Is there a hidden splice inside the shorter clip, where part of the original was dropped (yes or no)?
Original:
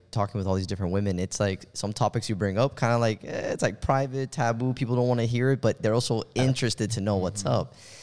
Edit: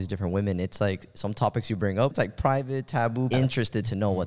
yes